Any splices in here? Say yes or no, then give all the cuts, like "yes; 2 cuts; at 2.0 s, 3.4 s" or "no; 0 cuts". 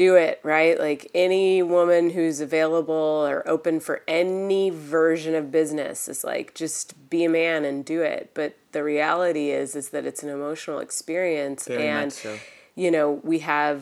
no; 0 cuts